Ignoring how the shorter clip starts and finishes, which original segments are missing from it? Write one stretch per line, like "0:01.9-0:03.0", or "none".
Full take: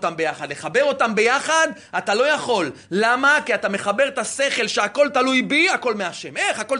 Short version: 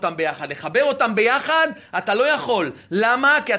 none